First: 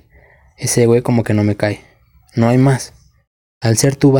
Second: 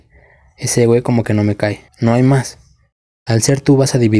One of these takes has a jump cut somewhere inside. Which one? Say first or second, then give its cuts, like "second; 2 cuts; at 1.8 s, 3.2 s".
second; 1 cut; at 1.9 s